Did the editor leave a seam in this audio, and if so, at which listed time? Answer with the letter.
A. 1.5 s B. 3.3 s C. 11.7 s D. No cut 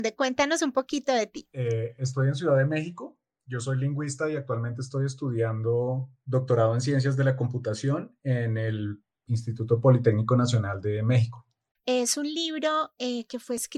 C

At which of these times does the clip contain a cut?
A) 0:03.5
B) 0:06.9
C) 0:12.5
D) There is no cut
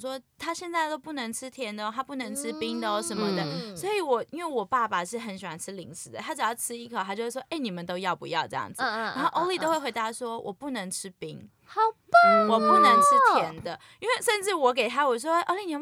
D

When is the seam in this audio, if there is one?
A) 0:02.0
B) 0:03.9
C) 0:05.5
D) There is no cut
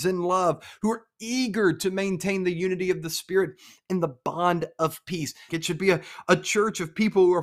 C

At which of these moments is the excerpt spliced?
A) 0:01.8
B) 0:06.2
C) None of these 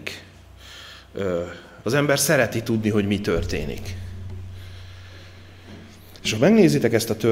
A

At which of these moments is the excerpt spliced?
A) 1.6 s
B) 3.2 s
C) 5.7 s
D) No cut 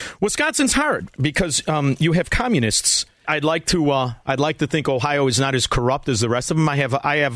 B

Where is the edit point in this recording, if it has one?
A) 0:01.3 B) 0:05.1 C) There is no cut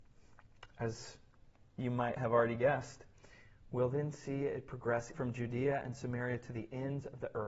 B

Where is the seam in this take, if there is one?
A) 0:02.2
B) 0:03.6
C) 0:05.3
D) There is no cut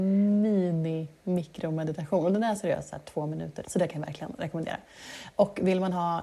B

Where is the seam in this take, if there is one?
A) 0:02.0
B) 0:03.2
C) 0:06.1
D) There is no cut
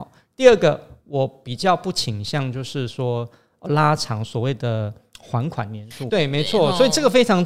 C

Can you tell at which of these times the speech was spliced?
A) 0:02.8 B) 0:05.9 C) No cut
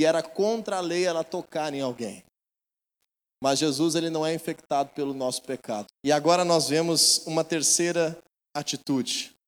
B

